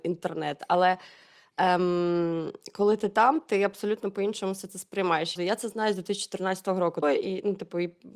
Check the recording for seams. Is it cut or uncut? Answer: cut